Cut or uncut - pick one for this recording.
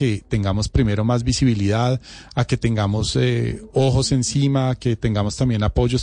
uncut